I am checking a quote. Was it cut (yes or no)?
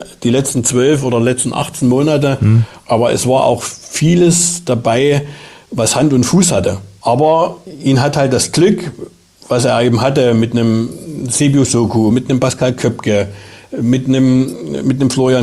no